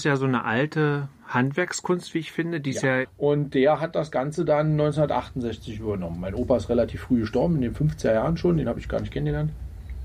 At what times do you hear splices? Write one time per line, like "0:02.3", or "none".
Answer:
0:03.0